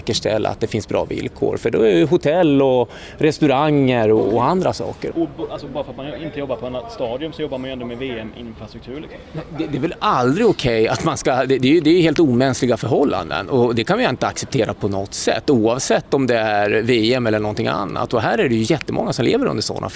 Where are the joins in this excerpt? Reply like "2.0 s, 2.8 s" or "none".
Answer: 5.1 s

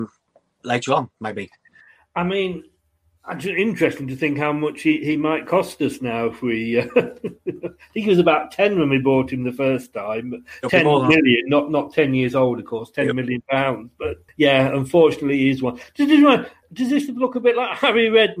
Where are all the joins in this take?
14.3 s, 16.6 s

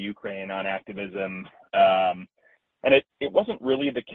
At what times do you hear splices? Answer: 3.1 s

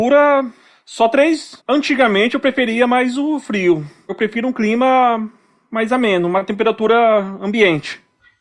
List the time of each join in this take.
1.6 s, 4.1 s

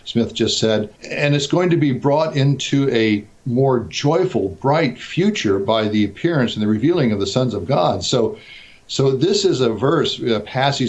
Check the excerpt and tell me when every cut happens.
1.0 s

